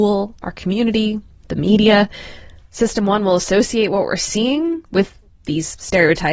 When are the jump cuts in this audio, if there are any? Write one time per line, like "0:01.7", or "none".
none